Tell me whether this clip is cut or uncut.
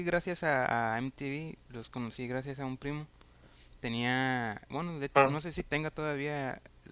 uncut